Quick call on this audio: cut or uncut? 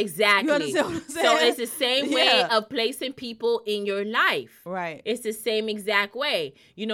uncut